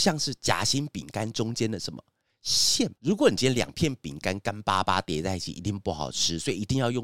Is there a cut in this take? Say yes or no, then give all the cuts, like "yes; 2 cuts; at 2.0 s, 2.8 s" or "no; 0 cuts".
yes; 1 cut; at 3.0 s